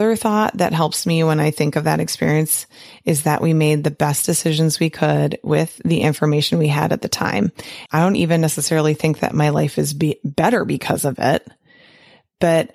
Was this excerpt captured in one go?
no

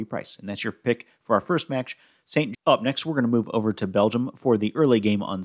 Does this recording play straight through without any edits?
no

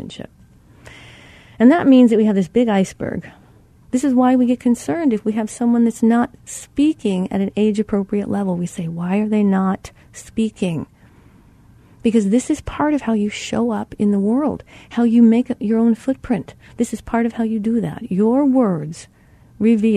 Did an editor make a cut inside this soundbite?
yes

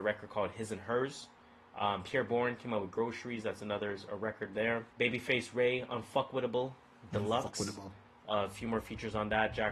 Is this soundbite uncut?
no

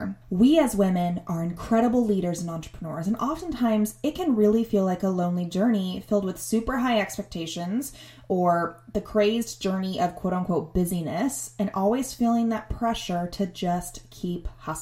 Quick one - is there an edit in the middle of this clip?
no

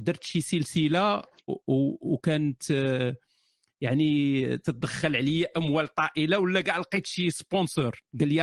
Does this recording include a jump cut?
yes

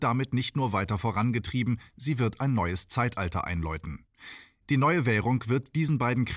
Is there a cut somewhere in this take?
no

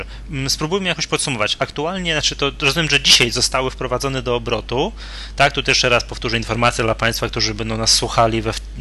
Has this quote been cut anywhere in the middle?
no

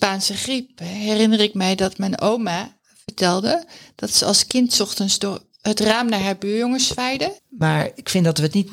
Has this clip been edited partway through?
yes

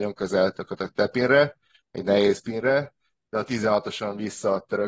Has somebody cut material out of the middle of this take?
no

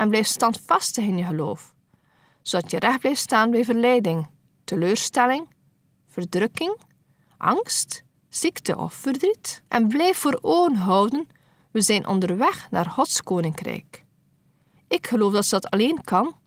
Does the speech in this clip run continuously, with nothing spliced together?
no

